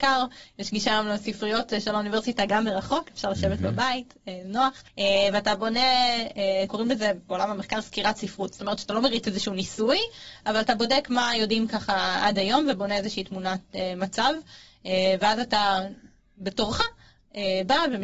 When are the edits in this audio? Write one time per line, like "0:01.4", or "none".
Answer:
0:04.9